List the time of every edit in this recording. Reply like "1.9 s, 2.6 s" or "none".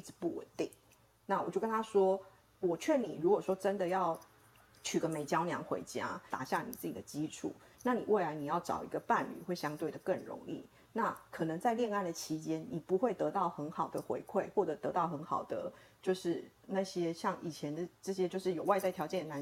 6.3 s